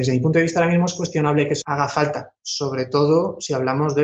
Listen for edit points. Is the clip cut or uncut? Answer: cut